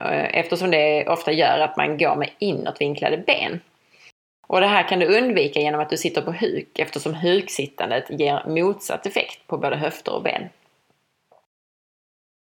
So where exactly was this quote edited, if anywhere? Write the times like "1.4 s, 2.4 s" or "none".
none